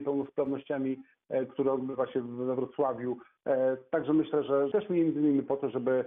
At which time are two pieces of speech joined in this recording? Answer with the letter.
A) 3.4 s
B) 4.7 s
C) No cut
B